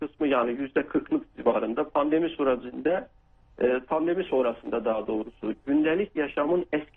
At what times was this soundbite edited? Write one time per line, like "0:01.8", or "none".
none